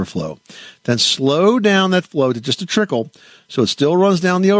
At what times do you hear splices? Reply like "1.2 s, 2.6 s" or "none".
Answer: none